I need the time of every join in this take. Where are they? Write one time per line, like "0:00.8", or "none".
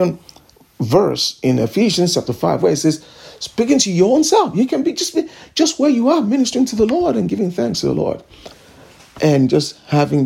none